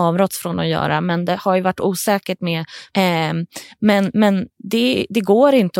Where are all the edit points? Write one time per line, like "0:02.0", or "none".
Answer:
0:02.9